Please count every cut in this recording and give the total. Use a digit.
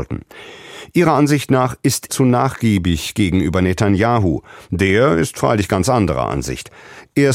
1